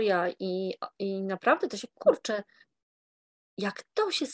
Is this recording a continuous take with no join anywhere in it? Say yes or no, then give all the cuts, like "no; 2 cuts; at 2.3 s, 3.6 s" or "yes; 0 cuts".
yes; 0 cuts